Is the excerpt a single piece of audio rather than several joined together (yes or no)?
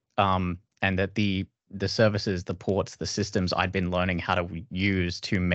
yes